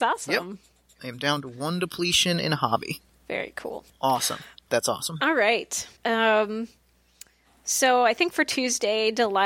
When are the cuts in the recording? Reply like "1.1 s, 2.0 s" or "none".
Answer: 6.0 s